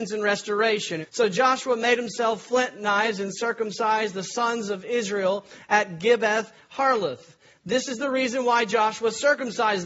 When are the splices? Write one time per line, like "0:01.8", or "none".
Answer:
0:01.0